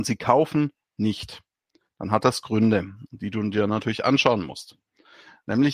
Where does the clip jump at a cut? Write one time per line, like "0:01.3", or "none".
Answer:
none